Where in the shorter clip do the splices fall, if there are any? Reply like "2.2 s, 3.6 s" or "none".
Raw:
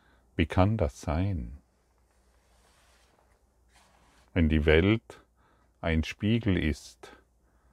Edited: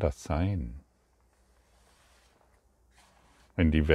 none